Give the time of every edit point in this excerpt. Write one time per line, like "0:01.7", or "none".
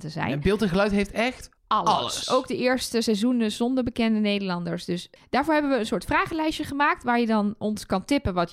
0:01.6
0:05.2